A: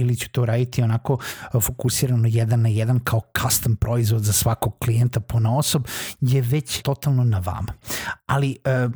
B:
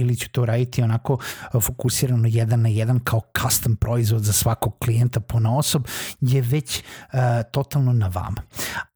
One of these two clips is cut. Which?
A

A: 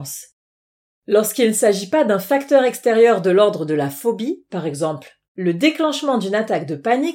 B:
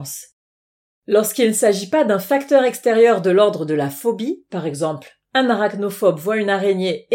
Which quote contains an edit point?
A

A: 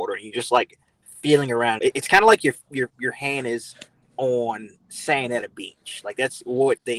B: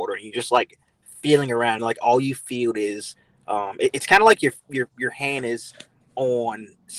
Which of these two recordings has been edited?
A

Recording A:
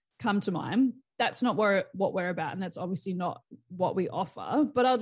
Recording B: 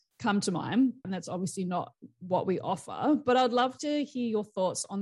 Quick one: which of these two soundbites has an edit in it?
B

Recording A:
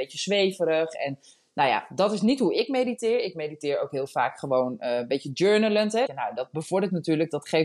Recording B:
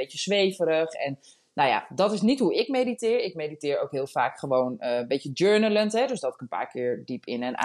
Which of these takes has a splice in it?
A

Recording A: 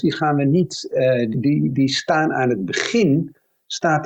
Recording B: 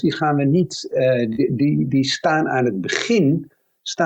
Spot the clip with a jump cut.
A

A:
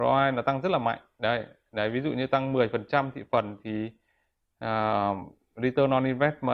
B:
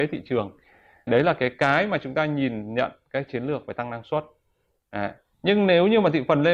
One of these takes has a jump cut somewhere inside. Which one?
B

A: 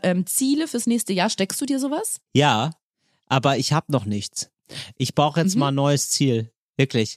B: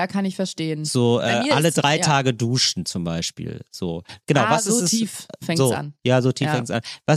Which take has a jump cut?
A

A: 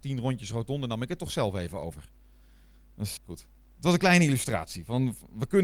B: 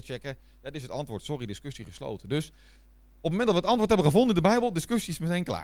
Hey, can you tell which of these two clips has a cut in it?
A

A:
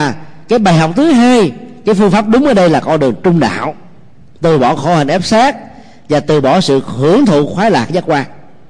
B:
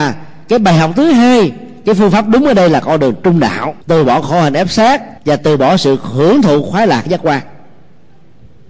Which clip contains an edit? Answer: B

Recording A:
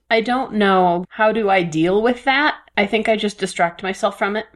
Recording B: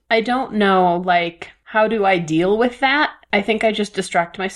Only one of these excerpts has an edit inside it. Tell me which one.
A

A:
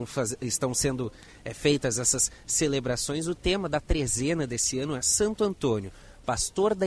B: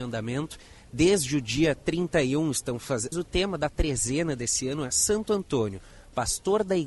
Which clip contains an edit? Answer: B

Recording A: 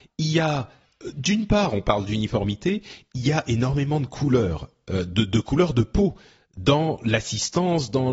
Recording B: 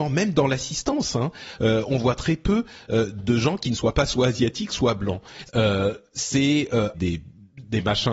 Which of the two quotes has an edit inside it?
B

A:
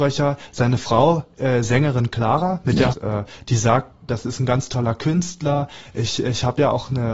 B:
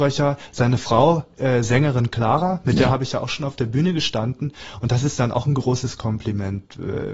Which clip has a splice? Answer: A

